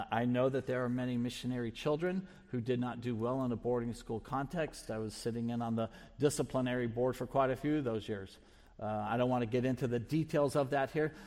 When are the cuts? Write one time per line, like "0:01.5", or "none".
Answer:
none